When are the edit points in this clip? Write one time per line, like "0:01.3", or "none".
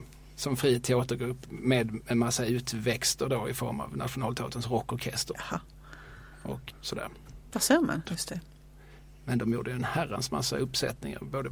0:05.3
0:06.7
0:08.0